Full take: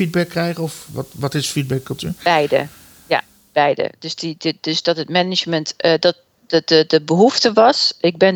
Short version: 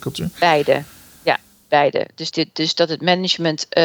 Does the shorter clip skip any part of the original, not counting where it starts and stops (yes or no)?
yes